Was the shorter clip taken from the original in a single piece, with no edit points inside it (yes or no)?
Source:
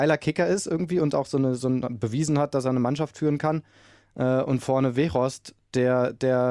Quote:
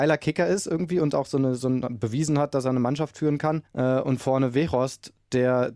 no